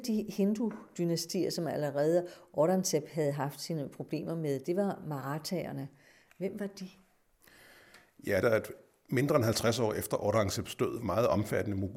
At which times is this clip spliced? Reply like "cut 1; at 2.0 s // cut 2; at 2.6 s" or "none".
cut 1; at 8.4 s // cut 2; at 11.0 s